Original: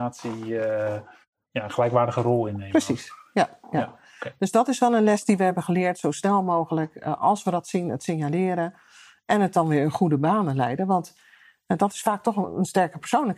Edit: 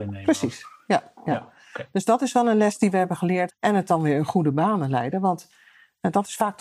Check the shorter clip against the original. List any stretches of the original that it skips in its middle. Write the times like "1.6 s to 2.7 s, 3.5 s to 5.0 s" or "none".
6.0 s to 9.1 s